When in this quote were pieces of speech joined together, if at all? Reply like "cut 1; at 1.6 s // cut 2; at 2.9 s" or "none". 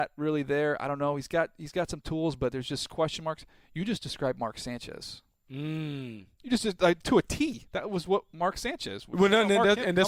none